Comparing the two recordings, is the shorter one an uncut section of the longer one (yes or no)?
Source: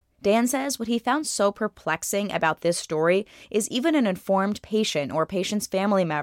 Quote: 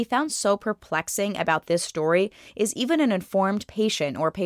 yes